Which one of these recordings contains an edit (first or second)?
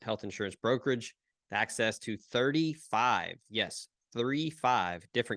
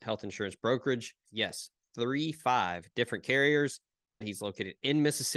second